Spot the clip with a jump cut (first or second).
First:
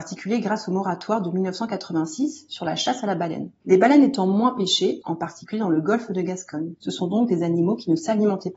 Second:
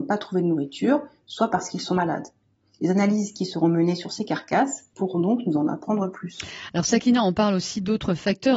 first